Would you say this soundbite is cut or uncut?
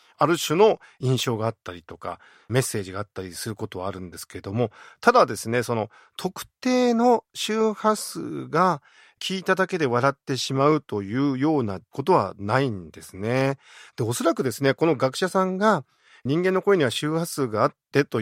uncut